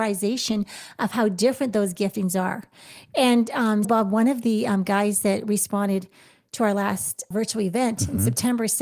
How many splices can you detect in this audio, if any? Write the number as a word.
two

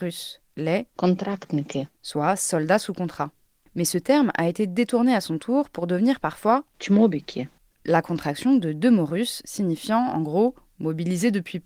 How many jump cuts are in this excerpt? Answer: one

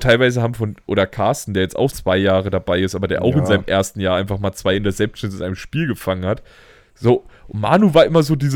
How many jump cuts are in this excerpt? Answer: one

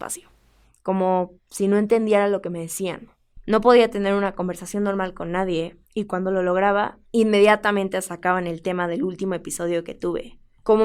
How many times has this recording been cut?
two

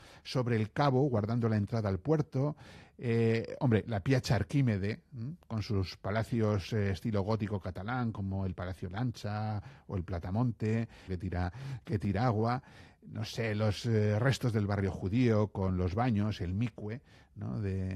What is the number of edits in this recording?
one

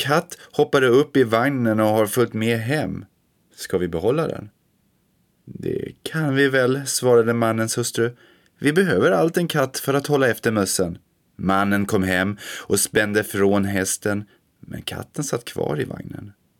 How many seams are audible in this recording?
one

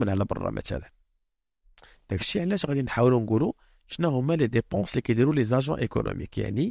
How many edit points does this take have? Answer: one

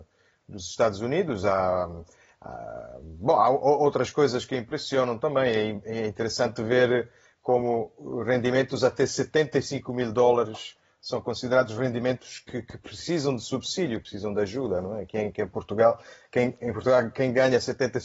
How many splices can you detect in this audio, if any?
zero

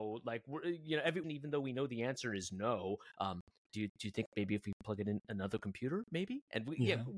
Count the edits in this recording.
one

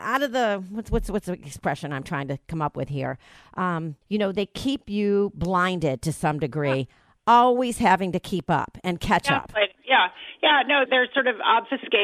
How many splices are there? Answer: two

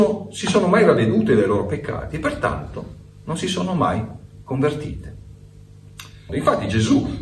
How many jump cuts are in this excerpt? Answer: one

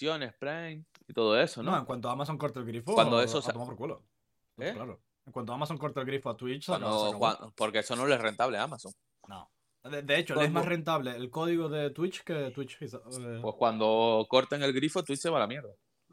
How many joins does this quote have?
zero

